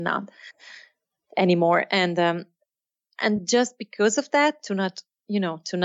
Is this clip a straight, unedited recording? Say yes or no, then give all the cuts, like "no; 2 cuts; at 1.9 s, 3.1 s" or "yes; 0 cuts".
yes; 0 cuts